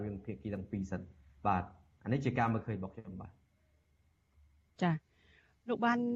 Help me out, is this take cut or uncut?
uncut